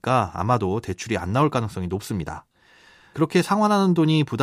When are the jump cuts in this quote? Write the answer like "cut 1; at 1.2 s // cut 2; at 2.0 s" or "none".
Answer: cut 1; at 3.1 s